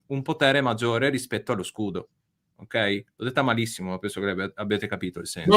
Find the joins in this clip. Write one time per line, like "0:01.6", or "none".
none